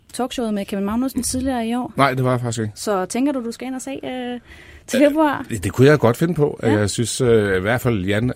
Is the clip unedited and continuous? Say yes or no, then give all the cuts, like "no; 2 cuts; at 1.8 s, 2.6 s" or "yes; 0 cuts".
yes; 0 cuts